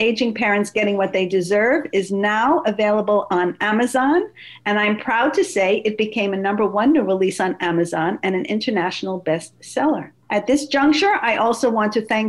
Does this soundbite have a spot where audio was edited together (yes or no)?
yes